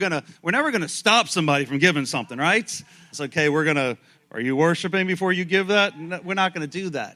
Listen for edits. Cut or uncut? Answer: cut